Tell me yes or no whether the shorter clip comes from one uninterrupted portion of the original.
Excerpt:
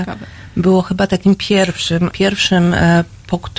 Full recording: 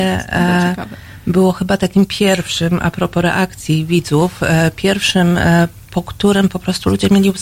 no